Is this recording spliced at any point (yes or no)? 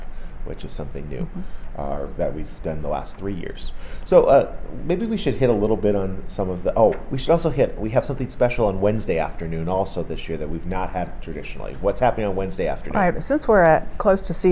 no